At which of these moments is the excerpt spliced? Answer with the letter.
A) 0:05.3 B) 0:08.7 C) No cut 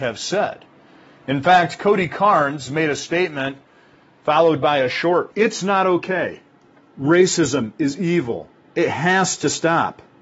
A